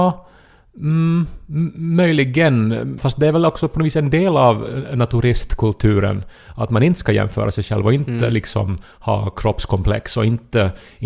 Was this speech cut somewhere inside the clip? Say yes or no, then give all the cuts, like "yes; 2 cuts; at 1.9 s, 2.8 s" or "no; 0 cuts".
yes; 1 cut; at 3.0 s